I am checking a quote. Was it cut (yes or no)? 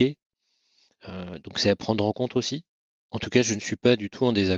no